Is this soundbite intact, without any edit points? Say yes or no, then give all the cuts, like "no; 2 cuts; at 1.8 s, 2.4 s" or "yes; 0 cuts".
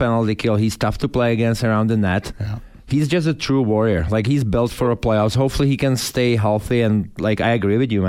yes; 0 cuts